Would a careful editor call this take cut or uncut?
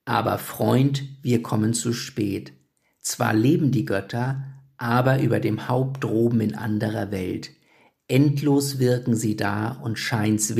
uncut